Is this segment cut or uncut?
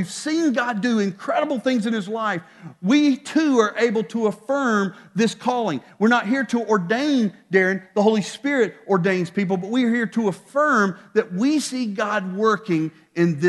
uncut